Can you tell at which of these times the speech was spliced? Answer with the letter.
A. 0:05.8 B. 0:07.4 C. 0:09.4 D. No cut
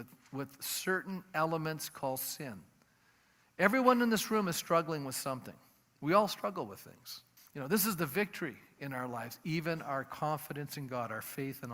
B